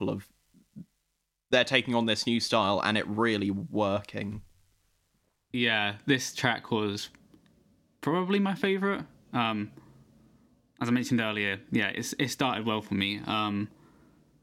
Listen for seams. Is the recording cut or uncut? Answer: uncut